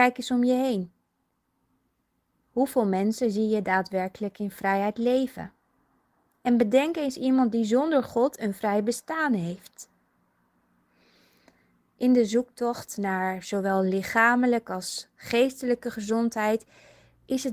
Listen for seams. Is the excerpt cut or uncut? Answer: uncut